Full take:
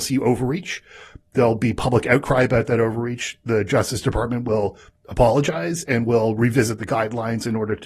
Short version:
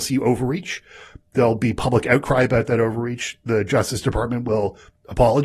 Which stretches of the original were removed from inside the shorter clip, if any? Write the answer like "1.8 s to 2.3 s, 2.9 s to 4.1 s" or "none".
none